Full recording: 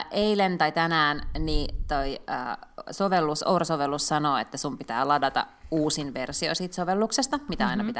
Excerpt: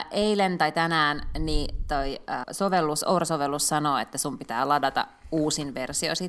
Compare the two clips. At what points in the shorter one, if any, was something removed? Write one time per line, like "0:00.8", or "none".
0:02.4